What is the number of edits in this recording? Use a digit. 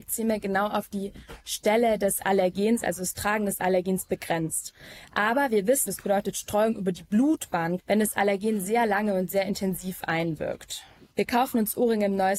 3